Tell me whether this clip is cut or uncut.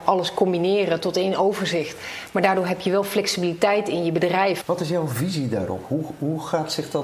cut